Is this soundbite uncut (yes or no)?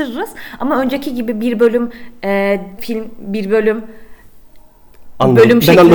no